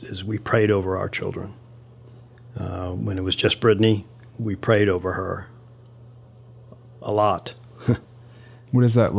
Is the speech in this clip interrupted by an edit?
no; 0 cuts

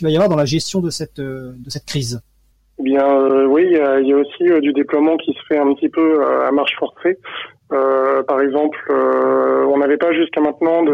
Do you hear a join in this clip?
no; 0 cuts

